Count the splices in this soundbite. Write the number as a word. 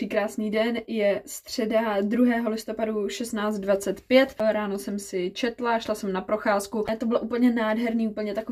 zero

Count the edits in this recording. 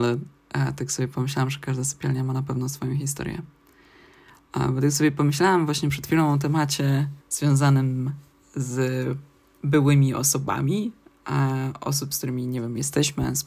one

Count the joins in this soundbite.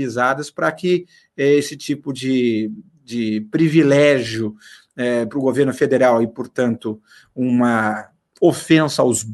zero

